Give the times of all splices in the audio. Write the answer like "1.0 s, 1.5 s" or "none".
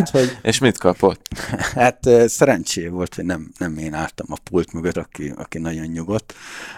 4.9 s